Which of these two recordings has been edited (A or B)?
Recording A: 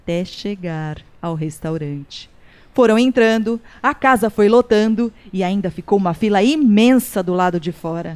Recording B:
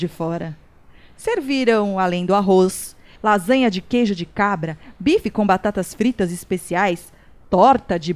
B